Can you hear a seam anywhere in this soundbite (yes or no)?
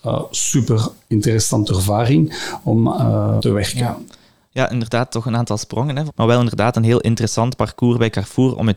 yes